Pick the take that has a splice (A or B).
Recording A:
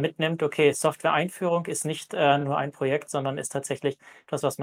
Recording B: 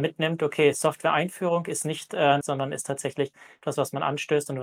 B